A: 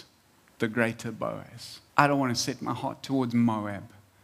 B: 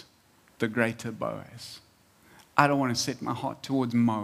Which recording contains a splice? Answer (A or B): A